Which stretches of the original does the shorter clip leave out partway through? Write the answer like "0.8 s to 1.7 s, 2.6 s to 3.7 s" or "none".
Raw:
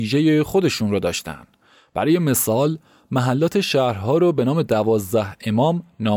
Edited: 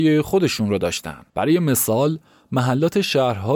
1.5 s to 1.9 s

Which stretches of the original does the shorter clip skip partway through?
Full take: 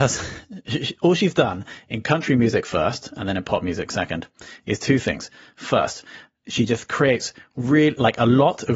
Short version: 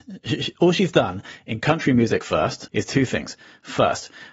3.1 s to 4.6 s

